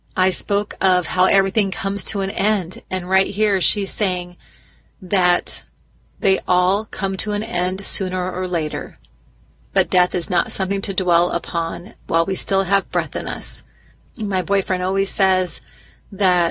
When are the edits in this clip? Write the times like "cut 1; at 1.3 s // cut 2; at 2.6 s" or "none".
cut 1; at 14.1 s